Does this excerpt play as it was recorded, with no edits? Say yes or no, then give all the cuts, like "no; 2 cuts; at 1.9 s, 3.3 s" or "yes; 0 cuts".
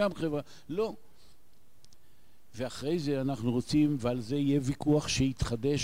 yes; 0 cuts